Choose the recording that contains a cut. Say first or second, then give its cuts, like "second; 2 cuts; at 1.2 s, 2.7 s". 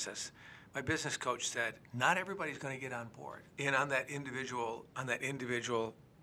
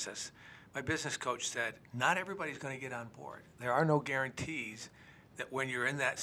first; 2 cuts; at 3.5 s, 4.9 s